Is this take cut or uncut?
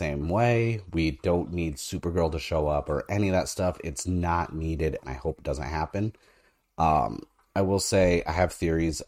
uncut